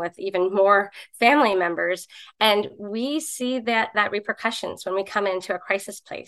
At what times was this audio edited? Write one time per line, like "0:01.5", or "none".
none